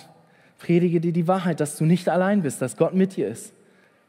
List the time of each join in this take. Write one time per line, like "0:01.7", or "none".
none